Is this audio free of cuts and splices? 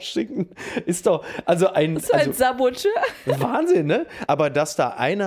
no; 1 cut; at 4.3 s

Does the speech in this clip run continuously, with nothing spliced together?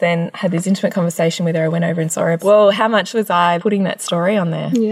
no; 2 cuts; at 2.4 s, 3.6 s

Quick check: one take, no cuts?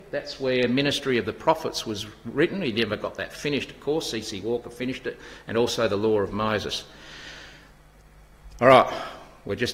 yes; 0 cuts

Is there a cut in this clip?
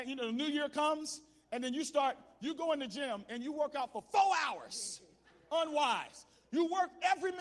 no; 0 cuts

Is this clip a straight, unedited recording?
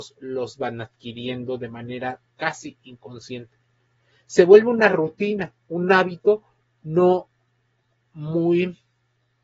yes; 0 cuts

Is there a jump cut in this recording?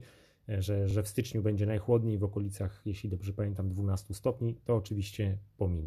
no; 0 cuts

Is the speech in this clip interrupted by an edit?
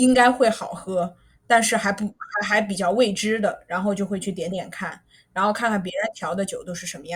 no; 0 cuts

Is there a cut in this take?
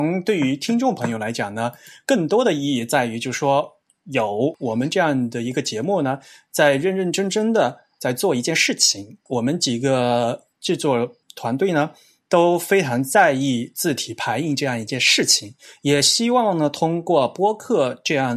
yes; 1 cut; at 11.2 s

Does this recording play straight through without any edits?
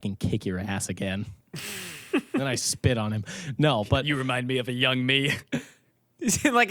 yes; 0 cuts

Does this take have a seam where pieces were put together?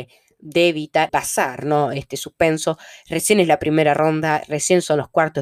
yes; 1 cut; at 1.1 s

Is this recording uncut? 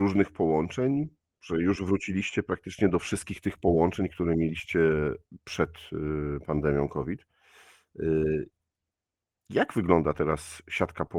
yes; 0 cuts

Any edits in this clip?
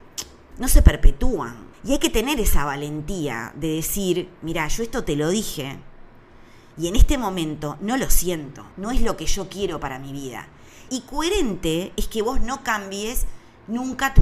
yes; 3 cuts; at 1.7 s, 8.7 s, 10.9 s

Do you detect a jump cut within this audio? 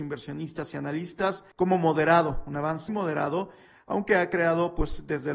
yes; 2 cuts; at 1.5 s, 2.9 s

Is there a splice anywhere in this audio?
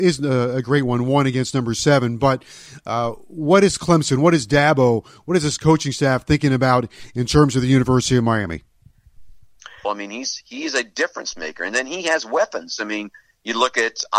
yes; 1 cut; at 9.8 s

